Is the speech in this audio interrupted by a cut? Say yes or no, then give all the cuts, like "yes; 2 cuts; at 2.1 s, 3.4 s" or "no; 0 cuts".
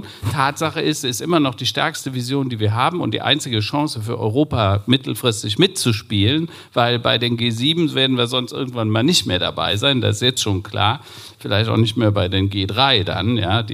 no; 0 cuts